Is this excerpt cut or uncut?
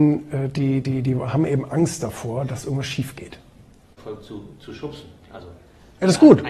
uncut